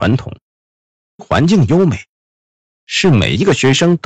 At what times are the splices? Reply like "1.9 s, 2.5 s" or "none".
none